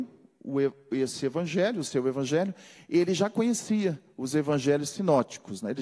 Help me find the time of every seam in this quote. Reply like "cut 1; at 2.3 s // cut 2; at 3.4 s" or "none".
none